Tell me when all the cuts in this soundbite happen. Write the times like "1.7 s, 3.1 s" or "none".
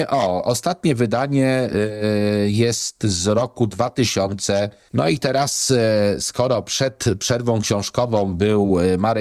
4.9 s

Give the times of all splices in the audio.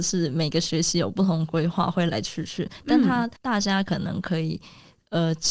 2.1 s, 3.4 s

